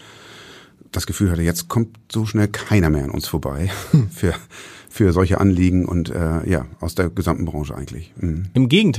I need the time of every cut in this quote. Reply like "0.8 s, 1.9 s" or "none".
none